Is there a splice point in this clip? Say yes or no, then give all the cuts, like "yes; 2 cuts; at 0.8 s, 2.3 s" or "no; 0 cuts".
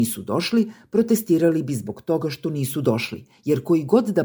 no; 0 cuts